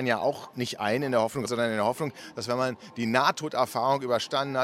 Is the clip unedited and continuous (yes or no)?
no